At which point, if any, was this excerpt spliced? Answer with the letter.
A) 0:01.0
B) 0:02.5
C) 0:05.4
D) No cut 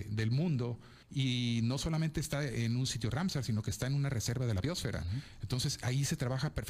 A